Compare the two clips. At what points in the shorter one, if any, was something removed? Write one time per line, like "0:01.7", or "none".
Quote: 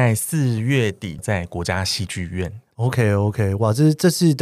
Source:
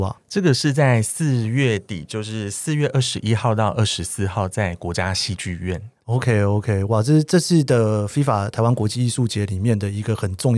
0:01.2